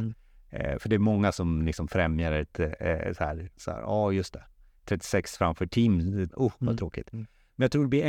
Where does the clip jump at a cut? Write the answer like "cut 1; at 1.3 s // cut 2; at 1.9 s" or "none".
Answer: cut 1; at 3.5 s // cut 2; at 6.3 s

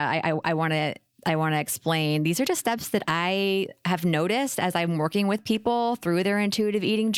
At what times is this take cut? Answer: none

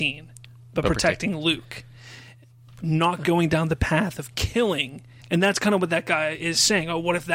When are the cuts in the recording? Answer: cut 1; at 5.2 s

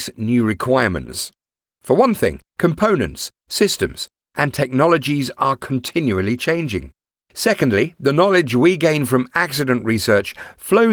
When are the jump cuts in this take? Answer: none

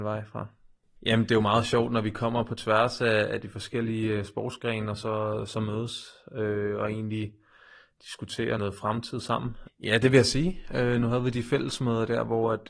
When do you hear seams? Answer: cut 1; at 1.0 s // cut 2; at 8.6 s // cut 3; at 9.7 s

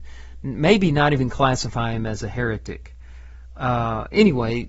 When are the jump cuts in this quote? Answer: none

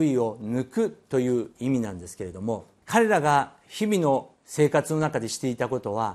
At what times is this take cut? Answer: cut 1; at 2.8 s // cut 2; at 4.4 s

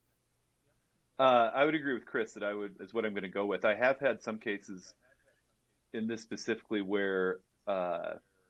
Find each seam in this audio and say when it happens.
cut 1; at 2.8 s

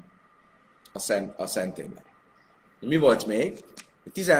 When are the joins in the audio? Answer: cut 1; at 2.6 s

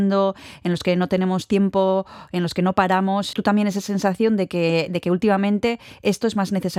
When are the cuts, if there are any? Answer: cut 1; at 3.3 s

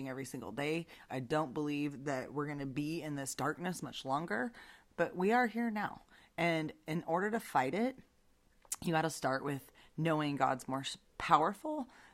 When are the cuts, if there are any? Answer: cut 1; at 1.1 s

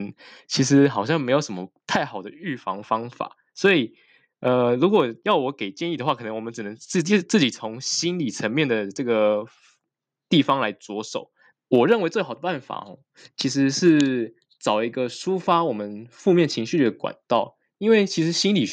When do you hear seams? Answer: cut 1; at 11.5 s

